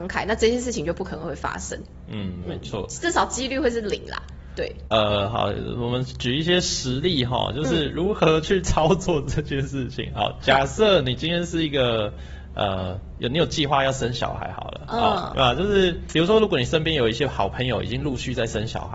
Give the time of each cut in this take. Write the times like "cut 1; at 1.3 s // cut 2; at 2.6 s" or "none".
cut 1; at 15.3 s